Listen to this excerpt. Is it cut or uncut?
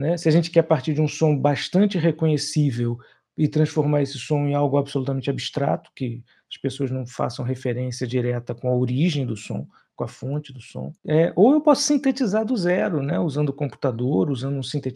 cut